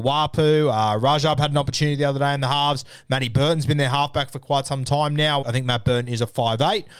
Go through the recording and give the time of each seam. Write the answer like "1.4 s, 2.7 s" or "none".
5.4 s